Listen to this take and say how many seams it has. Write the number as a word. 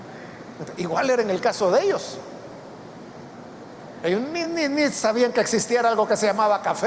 zero